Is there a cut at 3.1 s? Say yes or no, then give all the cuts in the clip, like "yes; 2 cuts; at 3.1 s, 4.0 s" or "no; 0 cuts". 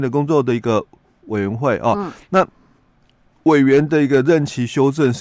no; 0 cuts